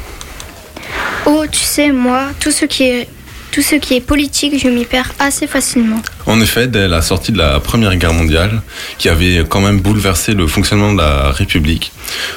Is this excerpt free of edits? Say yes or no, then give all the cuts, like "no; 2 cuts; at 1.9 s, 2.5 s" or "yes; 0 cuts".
no; 1 cut; at 6.2 s